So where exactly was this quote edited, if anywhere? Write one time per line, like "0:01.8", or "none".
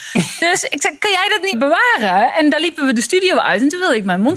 0:01.5